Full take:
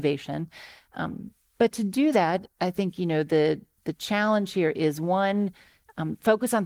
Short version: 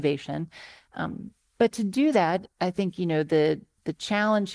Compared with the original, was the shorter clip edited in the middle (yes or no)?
no